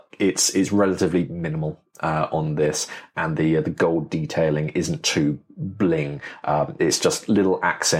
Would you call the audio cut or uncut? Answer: uncut